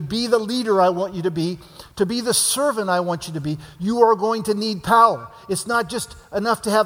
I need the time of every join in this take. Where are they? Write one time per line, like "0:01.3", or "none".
0:03.8